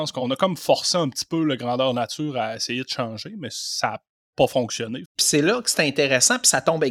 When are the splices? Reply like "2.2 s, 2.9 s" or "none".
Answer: 5.0 s